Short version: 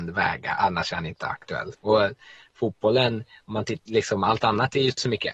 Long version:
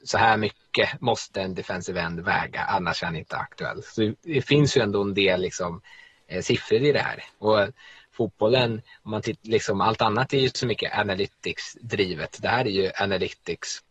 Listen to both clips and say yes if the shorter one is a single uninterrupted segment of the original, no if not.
no